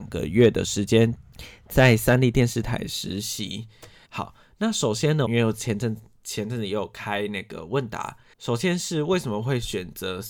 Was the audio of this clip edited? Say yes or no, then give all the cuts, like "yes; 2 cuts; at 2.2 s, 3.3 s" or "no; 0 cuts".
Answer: yes; 2 cuts; at 4.1 s, 5.2 s